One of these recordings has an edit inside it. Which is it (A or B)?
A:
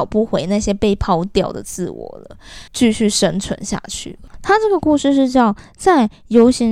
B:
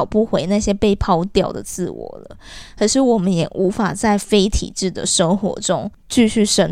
A